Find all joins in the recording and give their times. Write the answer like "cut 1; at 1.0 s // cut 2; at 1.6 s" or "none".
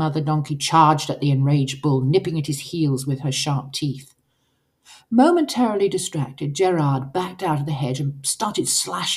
none